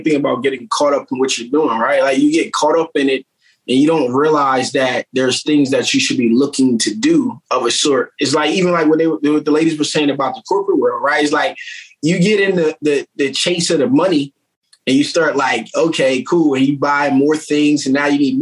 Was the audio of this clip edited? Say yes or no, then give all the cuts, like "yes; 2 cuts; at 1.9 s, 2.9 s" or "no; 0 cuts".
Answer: no; 0 cuts